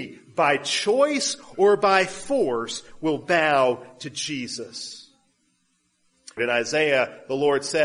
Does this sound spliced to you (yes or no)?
yes